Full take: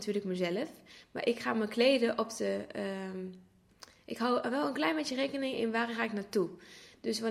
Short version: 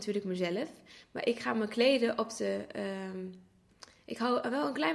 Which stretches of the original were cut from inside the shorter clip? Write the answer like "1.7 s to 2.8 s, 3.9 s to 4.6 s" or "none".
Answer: none

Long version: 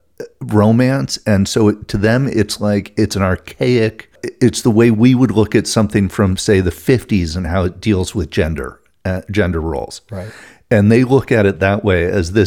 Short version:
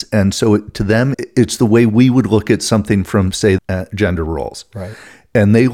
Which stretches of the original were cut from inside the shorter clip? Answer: 2.3 s to 4.2 s, 6.6 s to 8.9 s

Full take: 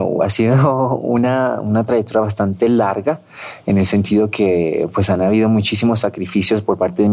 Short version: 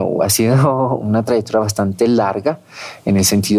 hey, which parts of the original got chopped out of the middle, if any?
1.0 s to 1.6 s

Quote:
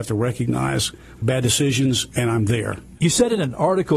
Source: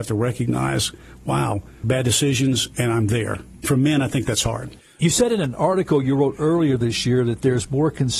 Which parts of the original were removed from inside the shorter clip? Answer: 1.2 s to 1.8 s, 3.6 s to 5.0 s

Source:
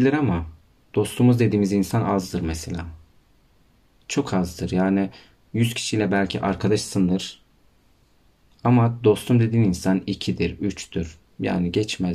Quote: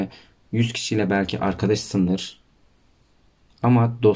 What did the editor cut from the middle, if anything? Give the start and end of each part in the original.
none

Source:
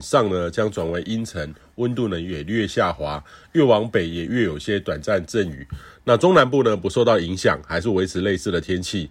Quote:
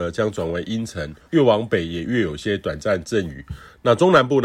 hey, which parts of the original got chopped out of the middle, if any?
1.7 s to 3.5 s

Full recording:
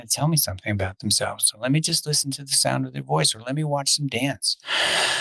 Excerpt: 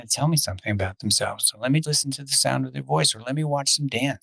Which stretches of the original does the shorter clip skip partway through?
1.8 s to 2.0 s

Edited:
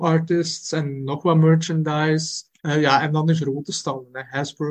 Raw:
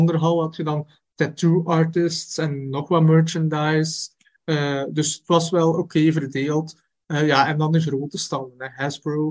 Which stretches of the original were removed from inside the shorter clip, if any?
4.2 s to 7.0 s

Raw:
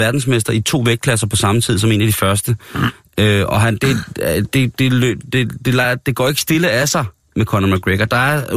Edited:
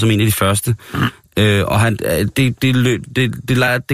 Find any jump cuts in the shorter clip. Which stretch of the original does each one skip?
3.8 s to 4.1 s

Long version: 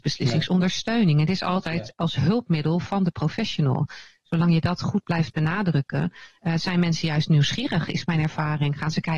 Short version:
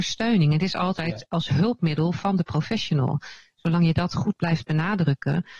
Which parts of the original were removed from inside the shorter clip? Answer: none

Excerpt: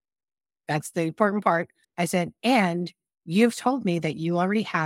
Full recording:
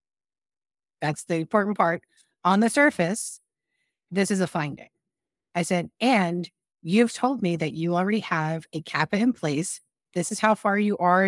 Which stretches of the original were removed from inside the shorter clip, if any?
2.2 s to 5.4 s

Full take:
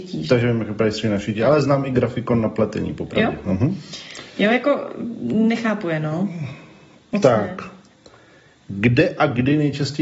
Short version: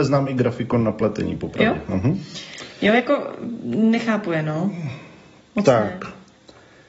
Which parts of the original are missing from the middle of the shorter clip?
none

